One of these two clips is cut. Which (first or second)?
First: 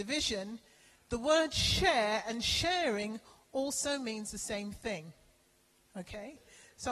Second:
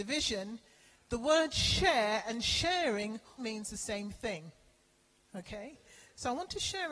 second